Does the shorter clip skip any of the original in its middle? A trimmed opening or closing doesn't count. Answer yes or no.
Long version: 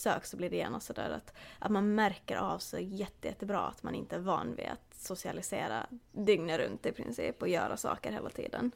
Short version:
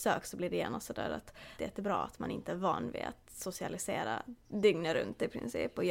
yes